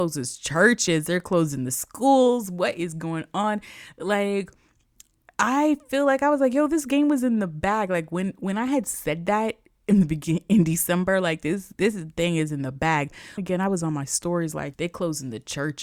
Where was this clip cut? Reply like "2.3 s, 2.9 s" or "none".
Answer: 13.4 s, 14.7 s